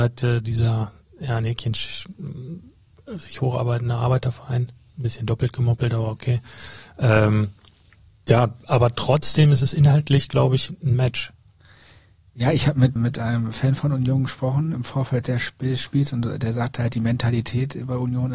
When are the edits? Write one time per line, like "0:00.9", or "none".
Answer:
0:13.0
0:14.7